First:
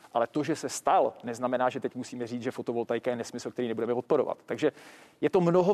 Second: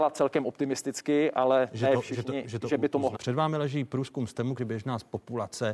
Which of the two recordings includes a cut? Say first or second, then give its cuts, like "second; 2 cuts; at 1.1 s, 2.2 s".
second; 2 cuts; at 3.1 s, 4.6 s